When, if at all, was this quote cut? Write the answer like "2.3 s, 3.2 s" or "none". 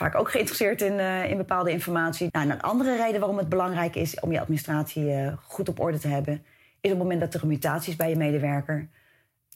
2.3 s